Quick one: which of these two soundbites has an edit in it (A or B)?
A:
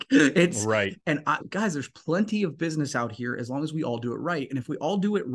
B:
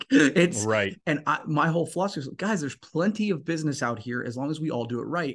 A